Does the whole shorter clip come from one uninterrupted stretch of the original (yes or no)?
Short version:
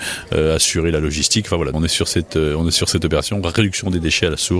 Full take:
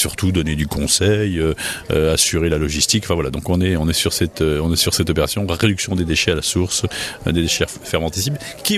no